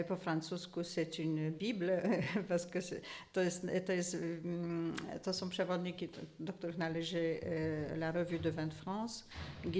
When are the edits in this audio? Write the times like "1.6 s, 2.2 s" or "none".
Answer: none